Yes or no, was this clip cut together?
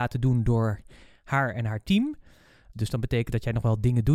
yes